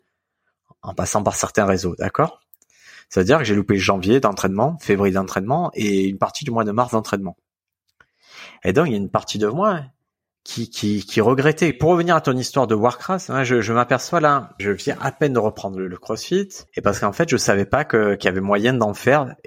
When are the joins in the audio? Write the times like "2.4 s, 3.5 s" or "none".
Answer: 11.7 s, 14.6 s, 16.7 s